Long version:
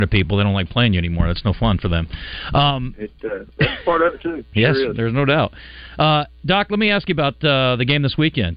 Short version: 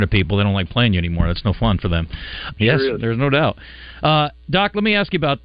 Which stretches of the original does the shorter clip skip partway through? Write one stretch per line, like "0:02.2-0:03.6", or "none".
0:02.5-0:04.5